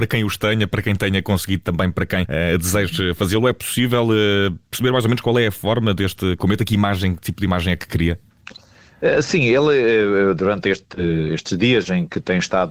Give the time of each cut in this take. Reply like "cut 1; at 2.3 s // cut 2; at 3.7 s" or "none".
cut 1; at 2.3 s